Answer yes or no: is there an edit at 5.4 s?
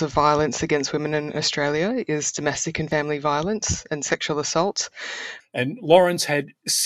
yes